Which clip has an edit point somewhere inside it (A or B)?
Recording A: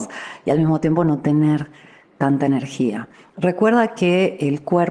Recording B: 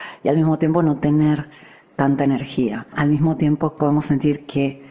B